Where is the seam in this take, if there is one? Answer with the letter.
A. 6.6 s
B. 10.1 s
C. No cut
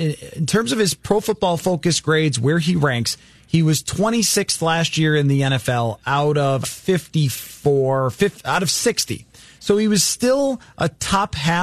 A